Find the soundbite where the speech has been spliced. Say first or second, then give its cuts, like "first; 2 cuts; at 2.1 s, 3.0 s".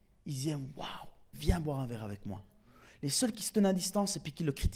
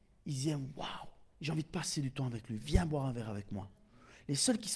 first; 1 cut; at 1.3 s